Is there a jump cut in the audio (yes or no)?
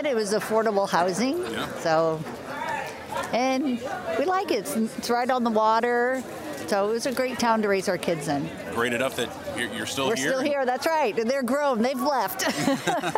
no